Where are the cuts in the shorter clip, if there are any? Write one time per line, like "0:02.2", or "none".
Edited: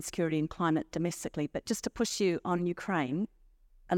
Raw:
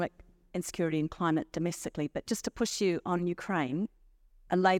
none